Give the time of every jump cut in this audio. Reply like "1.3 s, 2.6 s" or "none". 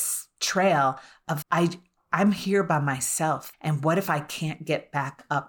1.4 s, 3.5 s